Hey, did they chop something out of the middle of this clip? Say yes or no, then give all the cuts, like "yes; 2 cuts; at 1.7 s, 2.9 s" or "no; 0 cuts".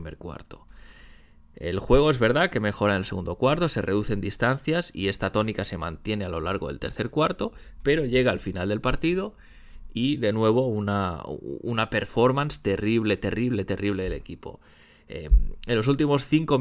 no; 0 cuts